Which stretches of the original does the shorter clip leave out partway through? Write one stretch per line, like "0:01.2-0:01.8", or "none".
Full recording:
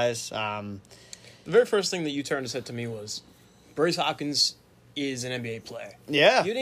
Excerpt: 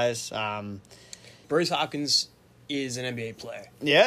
0:01.4-0:03.7